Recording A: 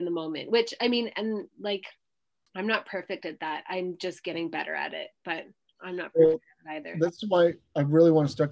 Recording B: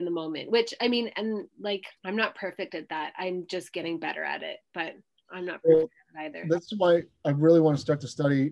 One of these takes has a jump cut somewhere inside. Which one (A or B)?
B